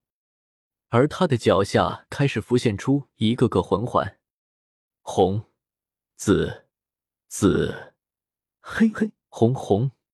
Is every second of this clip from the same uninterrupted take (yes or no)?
yes